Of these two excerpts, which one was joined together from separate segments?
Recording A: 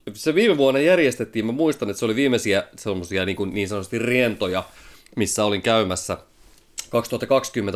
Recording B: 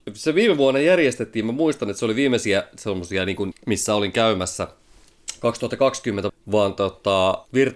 B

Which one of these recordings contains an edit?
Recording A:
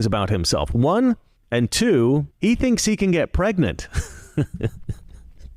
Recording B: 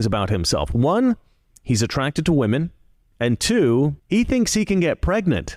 A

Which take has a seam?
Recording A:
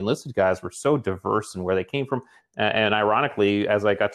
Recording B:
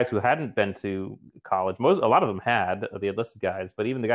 A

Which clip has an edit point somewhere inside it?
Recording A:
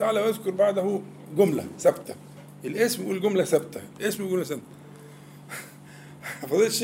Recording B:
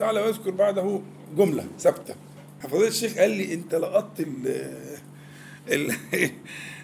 B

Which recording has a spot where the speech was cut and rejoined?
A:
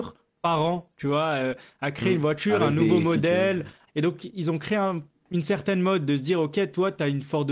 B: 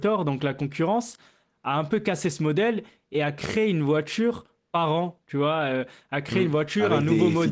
A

